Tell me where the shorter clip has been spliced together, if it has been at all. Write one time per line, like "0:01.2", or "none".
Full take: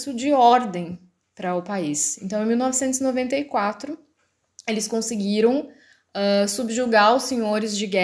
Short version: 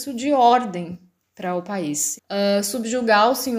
0:02.2